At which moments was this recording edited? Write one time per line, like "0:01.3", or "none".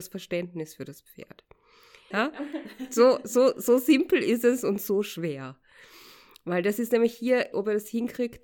0:02.1
0:07.5